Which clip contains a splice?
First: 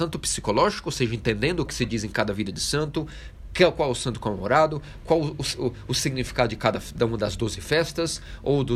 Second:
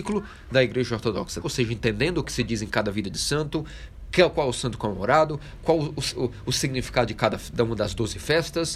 second; 1 cut; at 1.4 s

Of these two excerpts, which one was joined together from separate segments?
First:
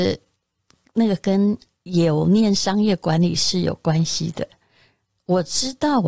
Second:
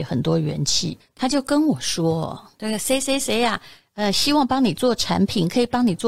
second; 1 cut; at 1.0 s

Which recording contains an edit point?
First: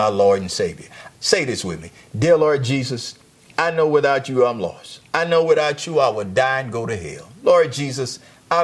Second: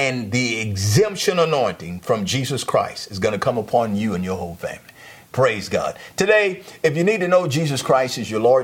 first; 1 cut; at 1.1 s

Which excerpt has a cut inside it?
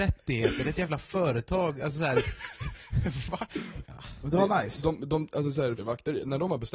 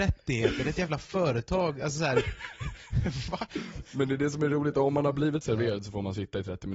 first; 2 cuts; at 3.8 s, 5.8 s

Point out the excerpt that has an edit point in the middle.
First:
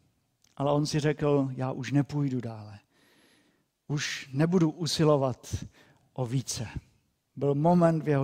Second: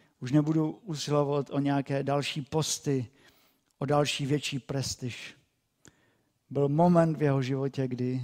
first; 1 cut; at 7.2 s

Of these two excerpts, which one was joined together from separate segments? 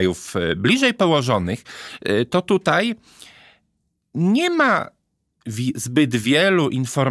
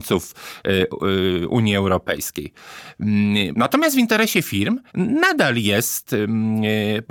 second; 2 cuts; at 3.5 s, 4.9 s

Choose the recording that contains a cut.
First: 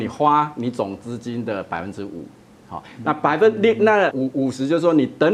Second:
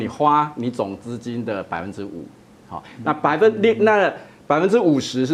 first; 1 cut; at 4.1 s

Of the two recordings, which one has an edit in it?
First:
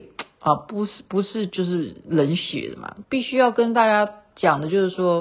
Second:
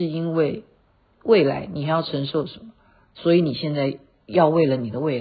first; 1 cut; at 3.0 s

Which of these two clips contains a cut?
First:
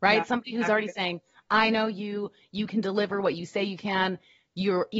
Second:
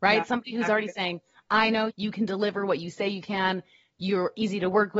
second; 1 cut; at 1.9 s

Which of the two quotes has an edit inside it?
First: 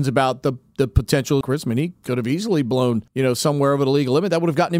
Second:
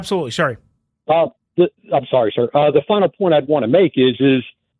first; 2 cuts; at 1.4 s, 3.1 s

